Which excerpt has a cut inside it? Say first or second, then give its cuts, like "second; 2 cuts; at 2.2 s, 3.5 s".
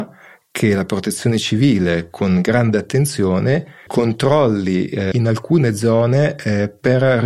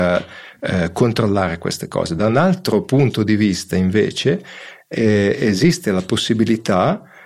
first; 2 cuts; at 3.9 s, 5.1 s